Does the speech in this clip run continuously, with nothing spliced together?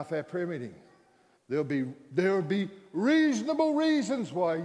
no; 1 cut; at 1.4 s

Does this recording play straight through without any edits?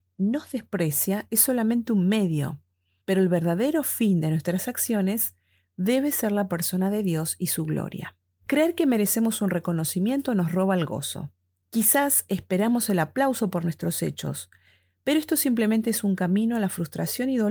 yes; 0 cuts

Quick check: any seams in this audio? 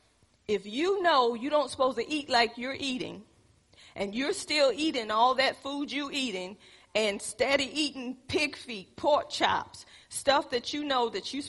no; 0 cuts

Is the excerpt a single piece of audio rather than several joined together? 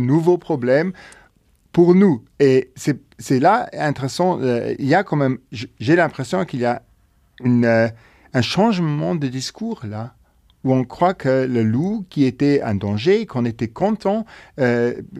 yes; 0 cuts

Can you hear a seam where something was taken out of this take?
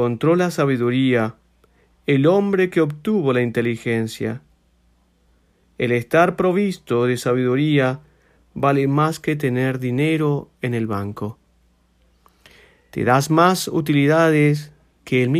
no; 0 cuts

